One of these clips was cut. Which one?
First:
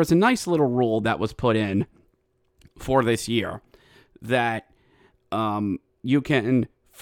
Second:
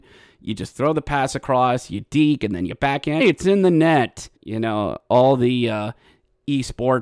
second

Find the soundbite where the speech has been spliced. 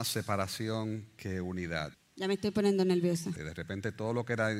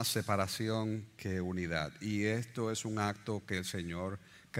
first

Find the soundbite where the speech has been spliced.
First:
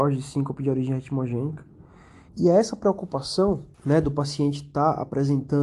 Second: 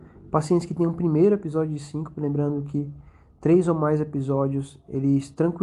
first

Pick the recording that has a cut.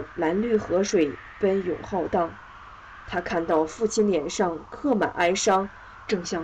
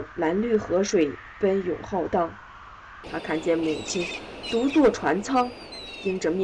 second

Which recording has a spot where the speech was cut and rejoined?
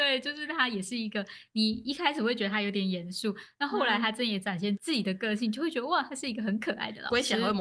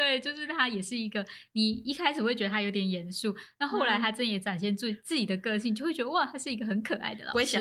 first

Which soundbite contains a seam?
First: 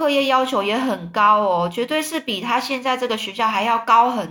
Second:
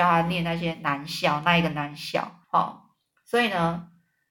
second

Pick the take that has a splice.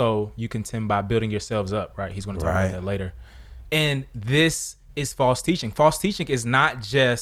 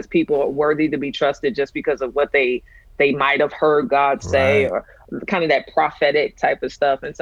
first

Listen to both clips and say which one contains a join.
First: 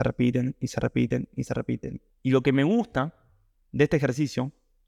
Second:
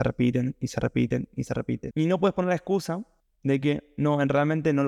second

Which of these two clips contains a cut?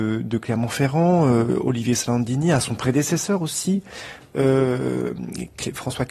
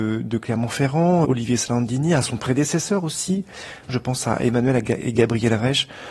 second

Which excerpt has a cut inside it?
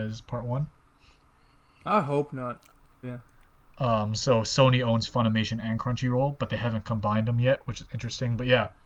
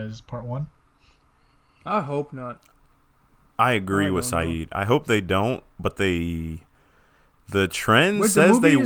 first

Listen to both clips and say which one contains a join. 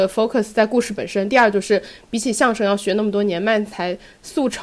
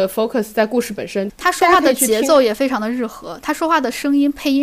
second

